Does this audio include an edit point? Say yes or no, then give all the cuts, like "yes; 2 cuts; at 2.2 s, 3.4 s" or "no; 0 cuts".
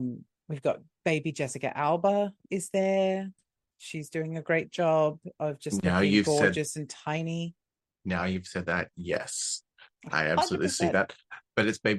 no; 0 cuts